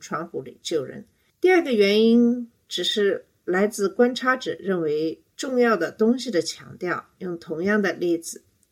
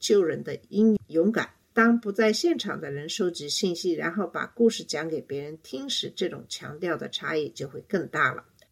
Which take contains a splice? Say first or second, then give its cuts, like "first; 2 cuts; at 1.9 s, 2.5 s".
second; 1 cut; at 1.0 s